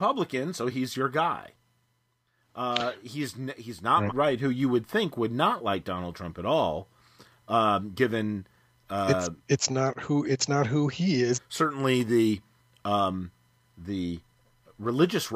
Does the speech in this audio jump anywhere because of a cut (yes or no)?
yes